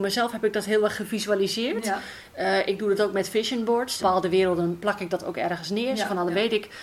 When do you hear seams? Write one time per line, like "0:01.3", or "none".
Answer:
0:04.0